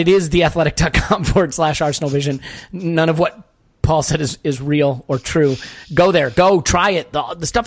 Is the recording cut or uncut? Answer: uncut